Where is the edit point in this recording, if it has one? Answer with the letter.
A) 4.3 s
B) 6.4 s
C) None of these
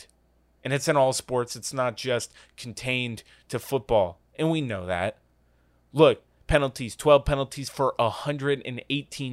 C